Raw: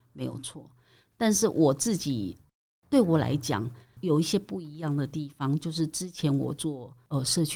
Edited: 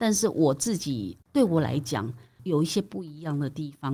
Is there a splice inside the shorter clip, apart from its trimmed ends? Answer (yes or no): yes